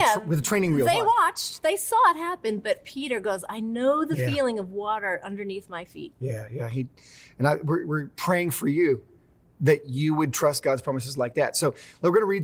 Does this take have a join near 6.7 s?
no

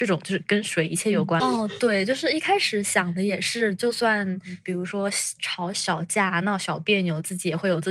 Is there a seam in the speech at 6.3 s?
no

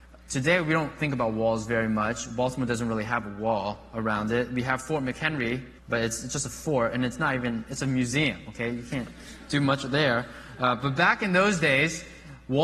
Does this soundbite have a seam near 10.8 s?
no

